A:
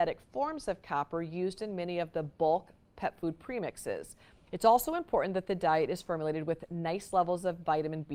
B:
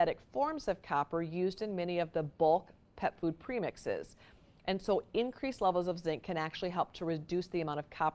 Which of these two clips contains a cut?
A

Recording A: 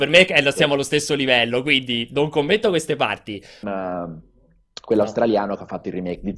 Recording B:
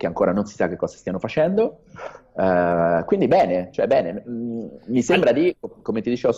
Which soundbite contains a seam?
A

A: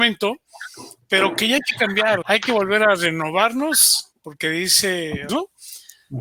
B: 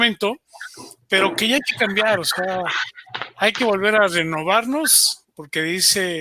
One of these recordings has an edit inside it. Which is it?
A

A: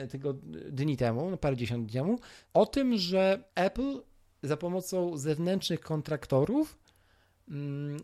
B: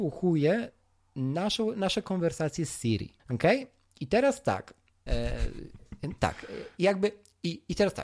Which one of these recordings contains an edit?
B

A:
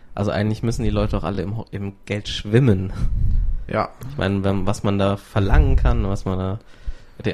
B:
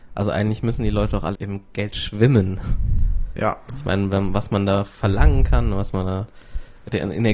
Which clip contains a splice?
B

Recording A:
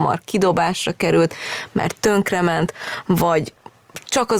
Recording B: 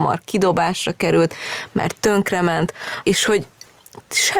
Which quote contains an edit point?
B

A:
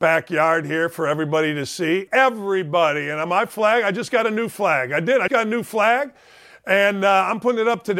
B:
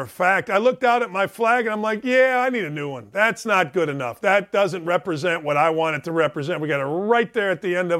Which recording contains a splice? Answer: A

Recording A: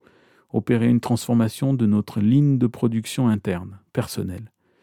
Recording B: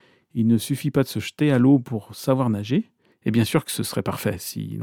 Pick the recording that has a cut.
B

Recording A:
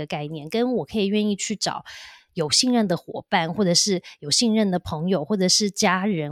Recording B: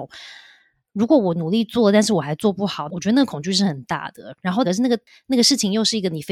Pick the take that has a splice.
B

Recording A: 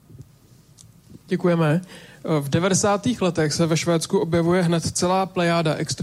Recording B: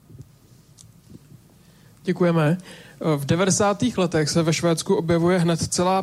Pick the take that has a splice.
A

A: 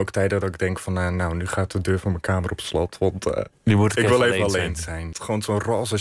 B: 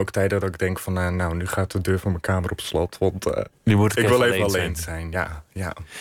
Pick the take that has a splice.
A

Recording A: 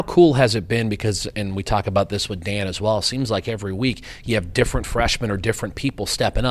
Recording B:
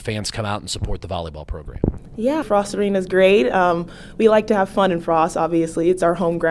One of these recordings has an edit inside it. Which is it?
B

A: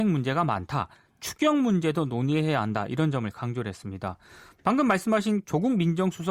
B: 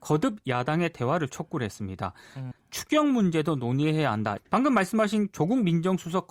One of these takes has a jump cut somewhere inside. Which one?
B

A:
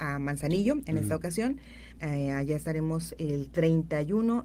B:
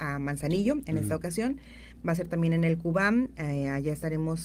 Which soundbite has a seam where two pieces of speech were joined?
A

